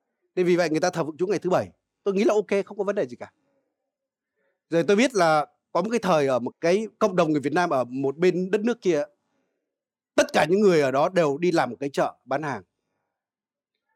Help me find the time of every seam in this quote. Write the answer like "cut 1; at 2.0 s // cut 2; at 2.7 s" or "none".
cut 1; at 6.5 s